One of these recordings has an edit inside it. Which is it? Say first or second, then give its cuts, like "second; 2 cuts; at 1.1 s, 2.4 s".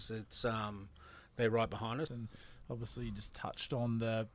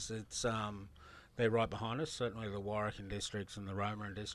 first; 1 cut; at 2.1 s